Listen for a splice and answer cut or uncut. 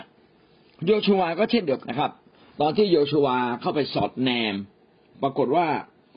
cut